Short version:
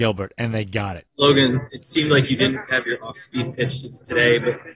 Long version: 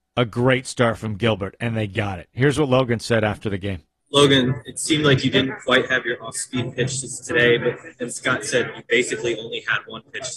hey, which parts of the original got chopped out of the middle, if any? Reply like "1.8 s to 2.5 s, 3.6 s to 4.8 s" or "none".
2.3 s to 4.0 s, 5.6 s to 5.9 s